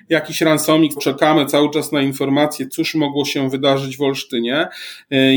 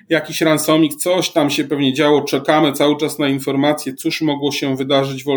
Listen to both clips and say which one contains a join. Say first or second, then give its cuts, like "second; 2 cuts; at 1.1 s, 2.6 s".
first; 1 cut; at 1.0 s